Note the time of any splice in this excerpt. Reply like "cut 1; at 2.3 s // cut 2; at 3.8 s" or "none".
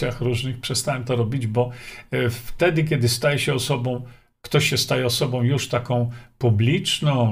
none